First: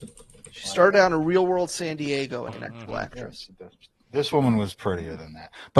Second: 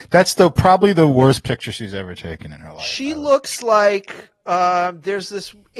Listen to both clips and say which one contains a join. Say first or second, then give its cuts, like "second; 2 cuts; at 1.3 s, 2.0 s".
first; 1 cut; at 2.5 s